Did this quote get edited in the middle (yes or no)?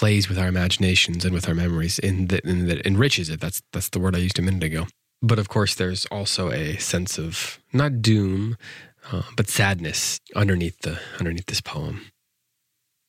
yes